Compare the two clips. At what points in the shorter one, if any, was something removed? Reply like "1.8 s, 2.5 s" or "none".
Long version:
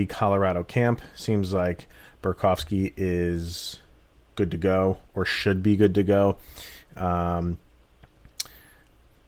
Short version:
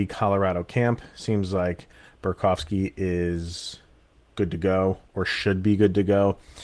none